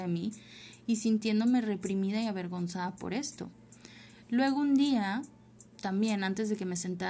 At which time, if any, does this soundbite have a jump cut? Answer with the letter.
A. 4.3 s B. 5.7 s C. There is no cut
B